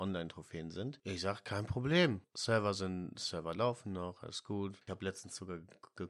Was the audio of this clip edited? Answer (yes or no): no